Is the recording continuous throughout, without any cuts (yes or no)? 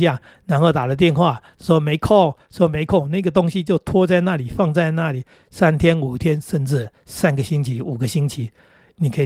yes